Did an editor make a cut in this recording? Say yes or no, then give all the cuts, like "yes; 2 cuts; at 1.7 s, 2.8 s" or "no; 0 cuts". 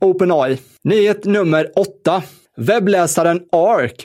no; 0 cuts